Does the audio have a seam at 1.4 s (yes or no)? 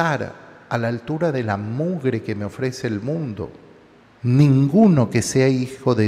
no